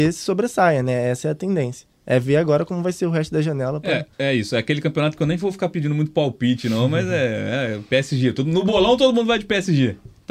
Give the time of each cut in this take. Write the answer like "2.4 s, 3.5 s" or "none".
4.1 s